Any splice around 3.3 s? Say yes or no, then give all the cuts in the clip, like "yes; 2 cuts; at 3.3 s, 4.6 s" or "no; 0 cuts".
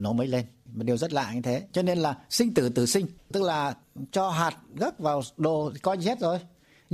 no; 1 cut; at 1.7 s